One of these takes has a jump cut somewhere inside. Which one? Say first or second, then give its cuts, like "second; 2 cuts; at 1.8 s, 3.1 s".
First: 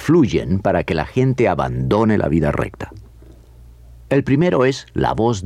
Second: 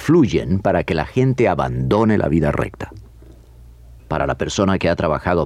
second; 1 cut; at 4.0 s